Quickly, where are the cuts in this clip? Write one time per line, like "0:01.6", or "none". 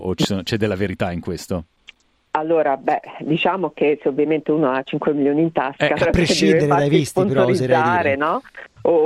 0:06.0